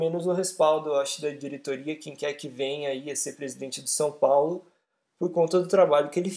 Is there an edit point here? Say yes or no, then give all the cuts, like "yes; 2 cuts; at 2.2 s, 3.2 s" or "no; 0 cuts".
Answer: no; 0 cuts